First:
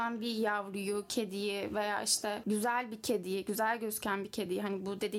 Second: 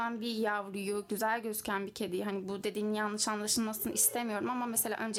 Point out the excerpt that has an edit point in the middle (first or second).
second